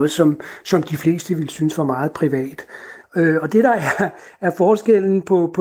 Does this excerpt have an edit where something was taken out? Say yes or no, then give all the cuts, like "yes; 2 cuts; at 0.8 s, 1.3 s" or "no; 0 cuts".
yes; 1 cut; at 3.0 s